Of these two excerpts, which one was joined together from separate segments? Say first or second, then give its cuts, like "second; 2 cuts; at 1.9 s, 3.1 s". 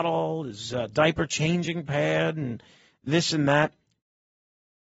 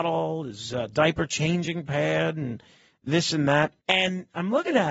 second; 1 cut; at 3.8 s